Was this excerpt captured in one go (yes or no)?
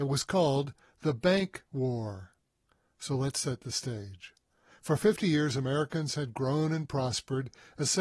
yes